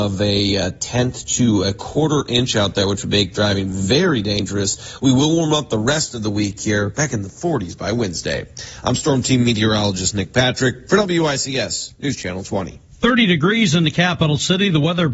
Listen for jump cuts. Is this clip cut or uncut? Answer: uncut